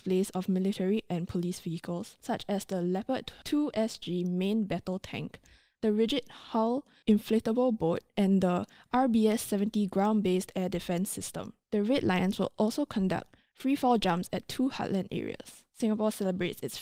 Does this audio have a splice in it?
no; 0 cuts

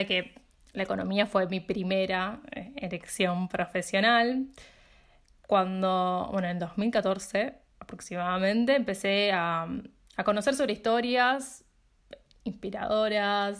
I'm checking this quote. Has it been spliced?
no; 0 cuts

